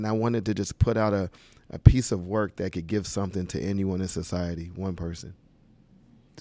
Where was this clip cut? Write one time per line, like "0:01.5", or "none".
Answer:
none